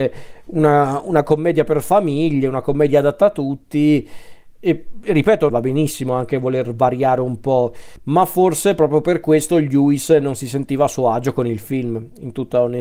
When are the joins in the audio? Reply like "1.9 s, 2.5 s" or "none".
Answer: 5.5 s